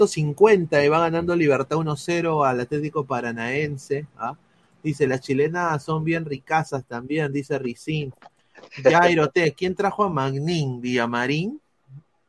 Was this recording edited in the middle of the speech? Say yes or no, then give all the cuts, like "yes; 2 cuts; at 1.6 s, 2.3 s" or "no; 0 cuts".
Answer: no; 0 cuts